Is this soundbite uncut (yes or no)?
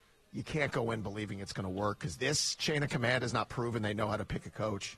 no